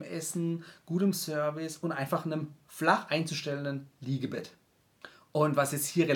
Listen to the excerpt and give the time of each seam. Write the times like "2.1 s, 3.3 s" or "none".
none